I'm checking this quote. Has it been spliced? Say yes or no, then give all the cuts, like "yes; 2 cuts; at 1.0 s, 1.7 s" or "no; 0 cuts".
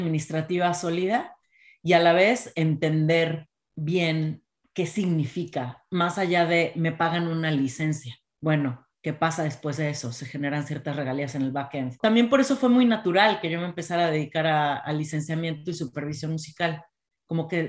yes; 1 cut; at 12.0 s